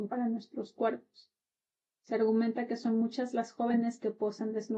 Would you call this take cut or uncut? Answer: uncut